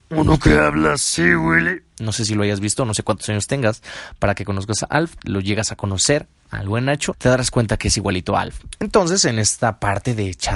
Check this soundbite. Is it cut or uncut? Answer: cut